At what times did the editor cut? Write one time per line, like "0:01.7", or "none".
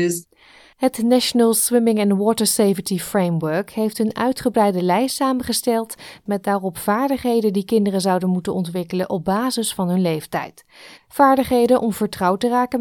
0:10.9